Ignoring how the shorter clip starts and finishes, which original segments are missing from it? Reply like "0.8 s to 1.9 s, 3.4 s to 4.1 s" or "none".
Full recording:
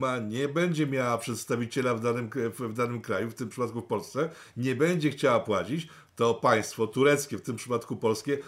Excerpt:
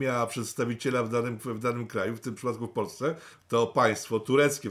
2.3 s to 2.5 s, 4.5 s to 6.0 s